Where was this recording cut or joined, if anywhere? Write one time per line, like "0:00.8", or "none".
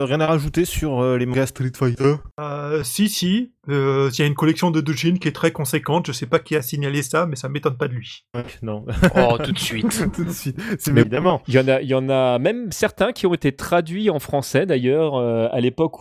0:11.0